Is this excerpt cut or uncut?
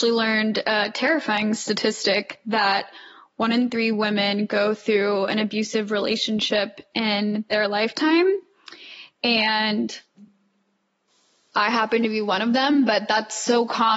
uncut